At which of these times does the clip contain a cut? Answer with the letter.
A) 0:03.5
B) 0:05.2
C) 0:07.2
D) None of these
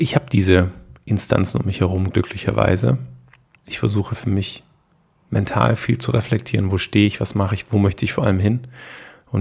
A